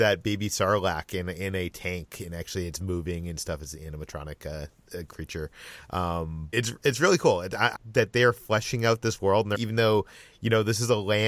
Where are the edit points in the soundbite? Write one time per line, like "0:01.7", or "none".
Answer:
0:06.5
0:07.7
0:09.5